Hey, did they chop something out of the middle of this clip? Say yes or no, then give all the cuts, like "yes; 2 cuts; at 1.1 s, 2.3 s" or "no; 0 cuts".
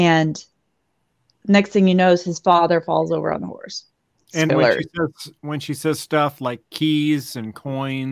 yes; 1 cut; at 4.5 s